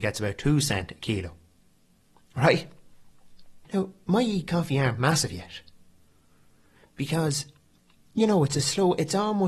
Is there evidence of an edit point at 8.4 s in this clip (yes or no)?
no